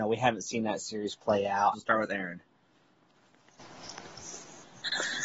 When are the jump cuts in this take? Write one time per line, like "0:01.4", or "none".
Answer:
0:01.7